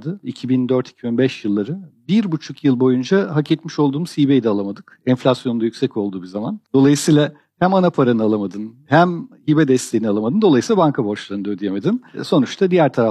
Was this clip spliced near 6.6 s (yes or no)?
yes